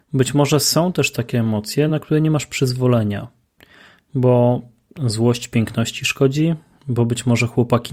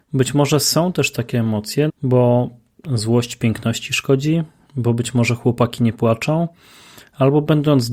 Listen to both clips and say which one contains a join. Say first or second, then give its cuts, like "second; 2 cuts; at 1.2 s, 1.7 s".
second; 1 cut; at 1.9 s